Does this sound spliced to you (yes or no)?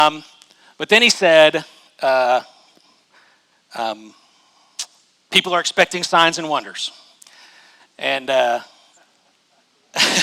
no